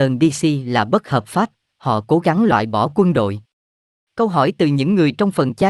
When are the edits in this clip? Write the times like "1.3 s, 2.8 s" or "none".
none